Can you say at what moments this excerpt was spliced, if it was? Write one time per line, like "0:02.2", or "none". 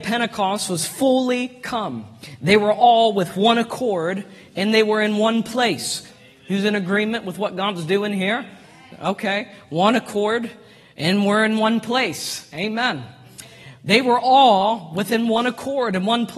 0:06.1